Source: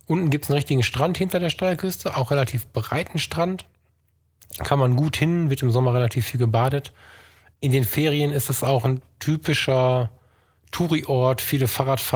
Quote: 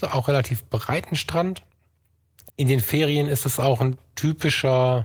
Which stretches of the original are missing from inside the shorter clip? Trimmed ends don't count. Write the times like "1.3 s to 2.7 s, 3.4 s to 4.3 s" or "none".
4.5 s to 7.5 s